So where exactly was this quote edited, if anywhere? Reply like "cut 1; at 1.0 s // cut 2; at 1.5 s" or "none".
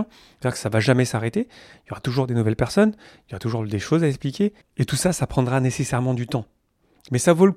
cut 1; at 4.6 s